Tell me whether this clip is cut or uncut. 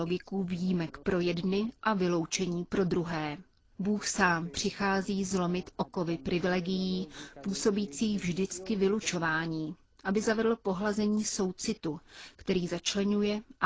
uncut